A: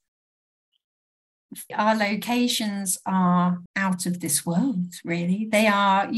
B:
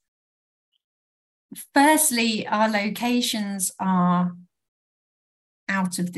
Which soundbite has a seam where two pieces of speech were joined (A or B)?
A